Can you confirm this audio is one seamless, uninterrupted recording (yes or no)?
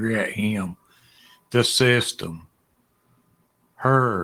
yes